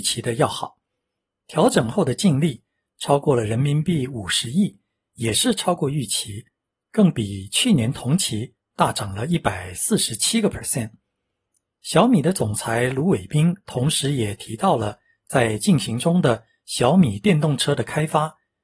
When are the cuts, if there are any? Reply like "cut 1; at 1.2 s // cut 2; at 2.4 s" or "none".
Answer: none